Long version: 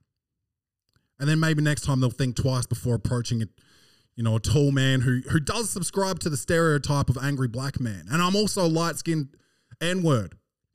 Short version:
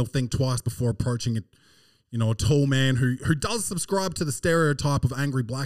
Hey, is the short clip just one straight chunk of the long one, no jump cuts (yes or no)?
yes